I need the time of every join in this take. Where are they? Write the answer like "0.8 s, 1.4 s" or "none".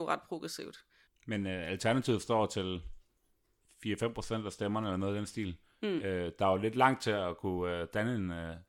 1.1 s